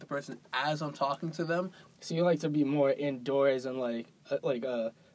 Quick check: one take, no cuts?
no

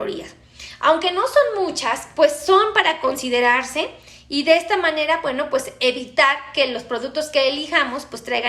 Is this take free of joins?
yes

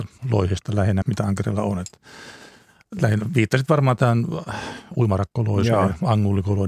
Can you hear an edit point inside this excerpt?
yes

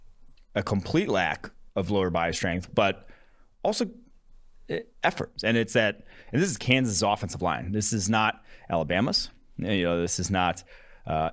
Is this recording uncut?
no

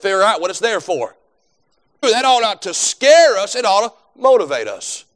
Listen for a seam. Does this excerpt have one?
yes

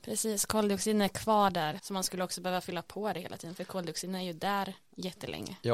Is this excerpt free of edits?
no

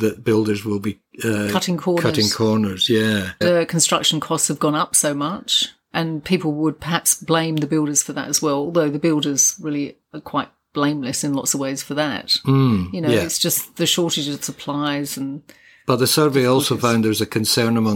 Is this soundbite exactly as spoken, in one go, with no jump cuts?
no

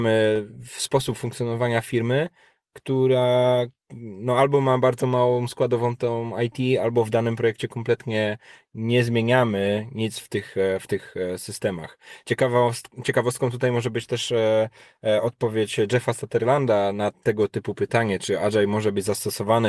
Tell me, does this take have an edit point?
no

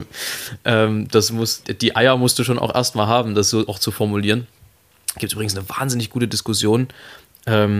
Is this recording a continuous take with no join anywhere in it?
no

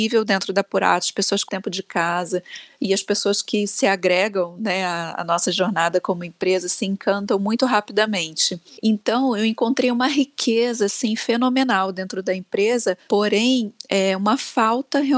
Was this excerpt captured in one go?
no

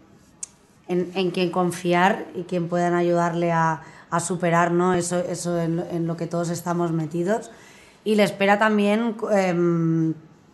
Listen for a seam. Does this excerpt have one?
no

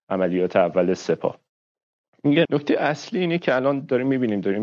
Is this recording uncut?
no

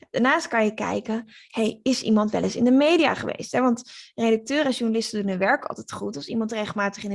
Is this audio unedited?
yes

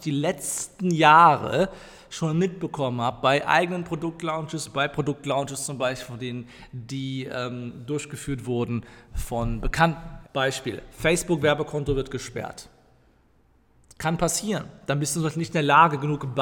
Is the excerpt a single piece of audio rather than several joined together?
no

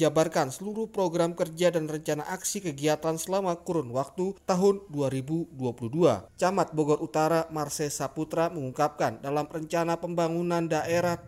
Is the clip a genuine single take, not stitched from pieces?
yes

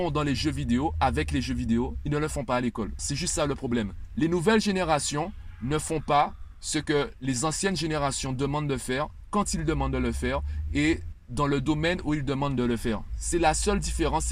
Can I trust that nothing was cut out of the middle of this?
no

